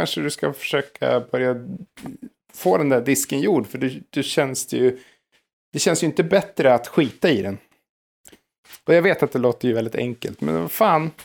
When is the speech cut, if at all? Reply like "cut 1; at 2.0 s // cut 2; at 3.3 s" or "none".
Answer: none